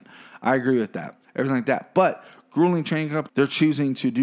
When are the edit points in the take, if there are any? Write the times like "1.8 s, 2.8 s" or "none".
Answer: 1.2 s, 3.3 s